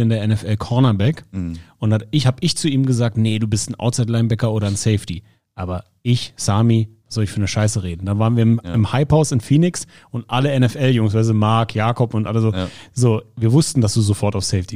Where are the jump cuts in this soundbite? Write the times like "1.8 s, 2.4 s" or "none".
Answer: none

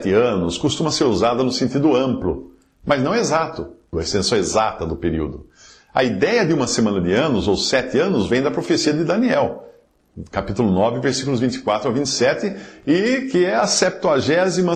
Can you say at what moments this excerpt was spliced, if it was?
3.9 s

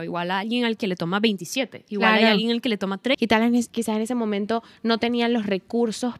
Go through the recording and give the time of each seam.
3.1 s

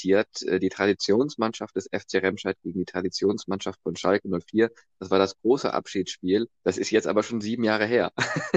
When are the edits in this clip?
6.6 s

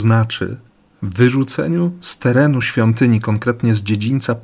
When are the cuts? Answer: none

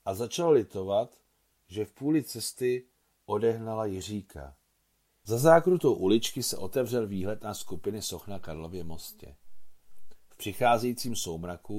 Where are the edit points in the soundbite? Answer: 5.3 s

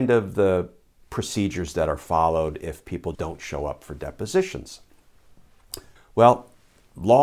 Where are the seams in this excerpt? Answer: 3.1 s, 6.0 s

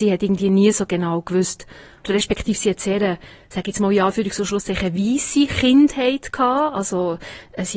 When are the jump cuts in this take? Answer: 2.0 s

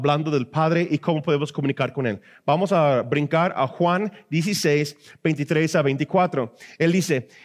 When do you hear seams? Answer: none

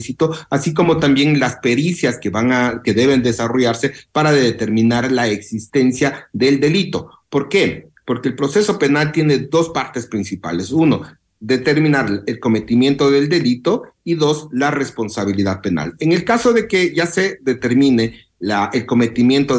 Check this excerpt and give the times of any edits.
none

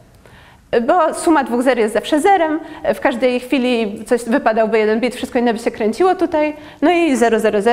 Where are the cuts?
none

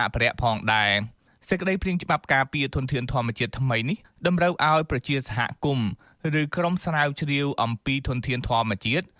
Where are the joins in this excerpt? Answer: none

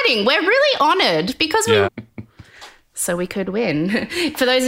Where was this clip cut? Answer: 1.8 s

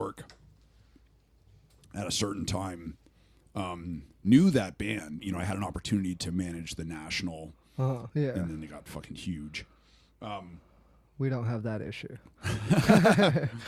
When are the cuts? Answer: 5.2 s, 8.1 s

